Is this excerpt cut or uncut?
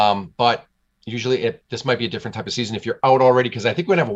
uncut